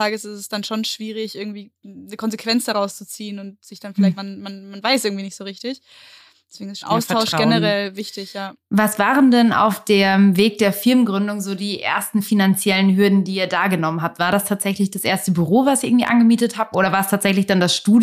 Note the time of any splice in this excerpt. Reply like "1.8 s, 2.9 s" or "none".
4.2 s, 6.8 s, 16.7 s